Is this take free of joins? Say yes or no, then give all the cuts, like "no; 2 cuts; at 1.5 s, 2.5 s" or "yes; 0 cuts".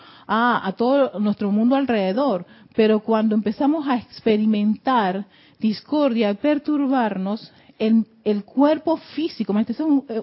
yes; 0 cuts